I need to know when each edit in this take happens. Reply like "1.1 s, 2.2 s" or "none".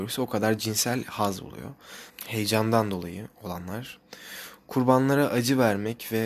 2.1 s